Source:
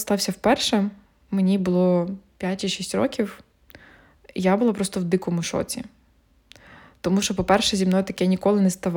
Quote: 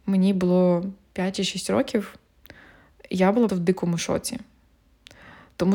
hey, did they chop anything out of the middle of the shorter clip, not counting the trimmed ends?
yes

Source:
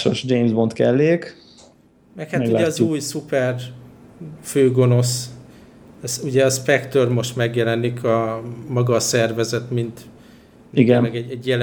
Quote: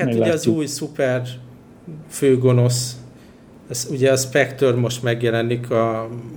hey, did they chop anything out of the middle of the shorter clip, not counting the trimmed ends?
no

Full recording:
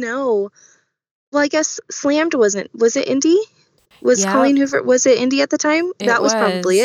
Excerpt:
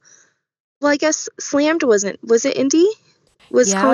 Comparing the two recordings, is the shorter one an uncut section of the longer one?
yes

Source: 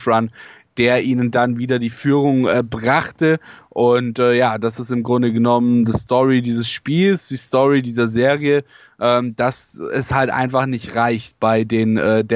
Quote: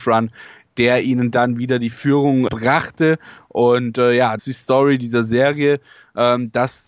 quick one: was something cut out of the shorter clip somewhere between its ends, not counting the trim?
yes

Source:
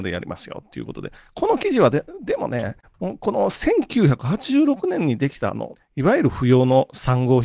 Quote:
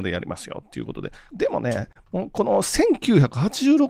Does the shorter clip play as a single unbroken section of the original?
no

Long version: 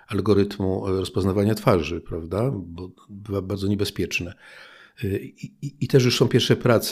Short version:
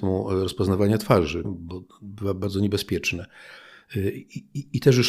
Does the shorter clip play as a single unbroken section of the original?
no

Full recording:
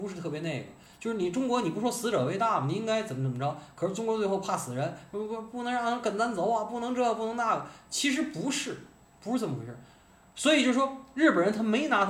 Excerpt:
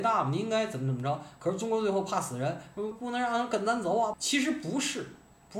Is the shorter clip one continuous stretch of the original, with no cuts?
no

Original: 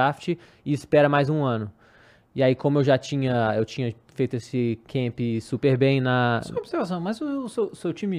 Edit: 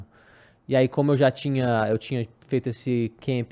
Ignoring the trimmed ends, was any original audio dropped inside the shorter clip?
no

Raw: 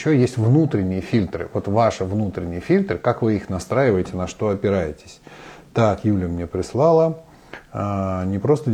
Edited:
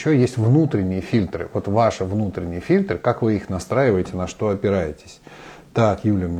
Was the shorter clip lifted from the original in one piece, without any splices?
yes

